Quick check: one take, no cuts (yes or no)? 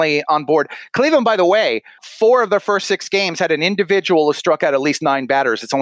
no